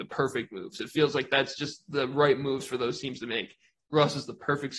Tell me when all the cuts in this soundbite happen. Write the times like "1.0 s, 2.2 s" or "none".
3.8 s